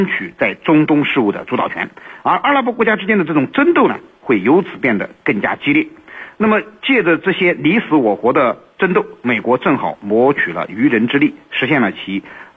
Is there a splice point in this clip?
no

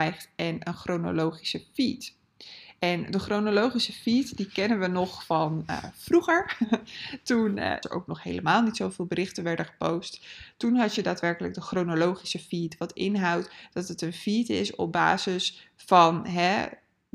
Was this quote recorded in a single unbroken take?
no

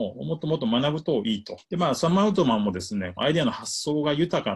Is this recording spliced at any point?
yes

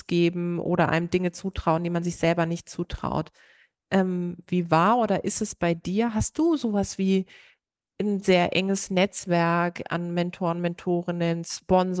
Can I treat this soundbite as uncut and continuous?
yes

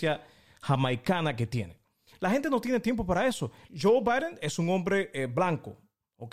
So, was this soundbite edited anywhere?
yes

